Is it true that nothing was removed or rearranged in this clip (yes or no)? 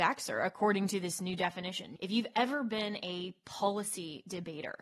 no